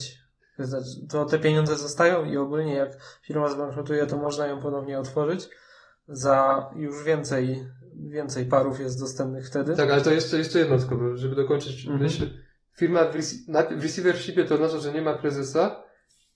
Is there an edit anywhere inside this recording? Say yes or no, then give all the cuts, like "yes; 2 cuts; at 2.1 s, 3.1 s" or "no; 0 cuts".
no; 0 cuts